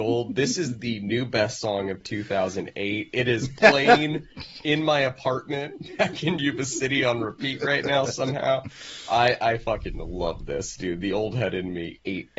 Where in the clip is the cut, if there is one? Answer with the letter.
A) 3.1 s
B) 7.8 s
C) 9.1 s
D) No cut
D